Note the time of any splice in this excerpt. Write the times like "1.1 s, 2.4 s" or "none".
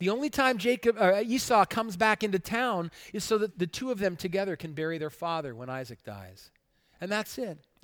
3.5 s